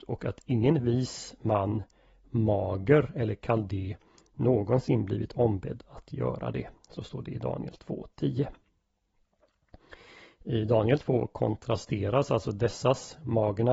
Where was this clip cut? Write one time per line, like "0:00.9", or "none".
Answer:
none